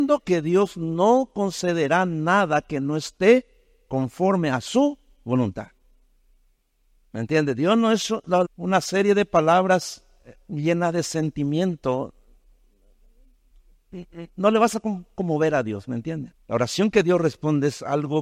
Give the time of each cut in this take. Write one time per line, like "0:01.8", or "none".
0:08.4
0:16.3